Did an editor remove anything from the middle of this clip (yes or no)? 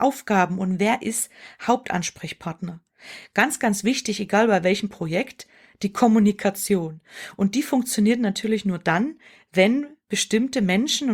no